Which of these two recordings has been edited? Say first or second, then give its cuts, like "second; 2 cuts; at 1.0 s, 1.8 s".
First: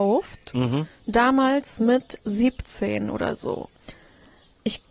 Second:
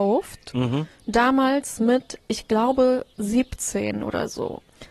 first; 1 cut; at 2.2 s